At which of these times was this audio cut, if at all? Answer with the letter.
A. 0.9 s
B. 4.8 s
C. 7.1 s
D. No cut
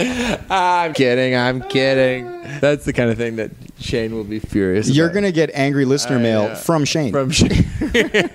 A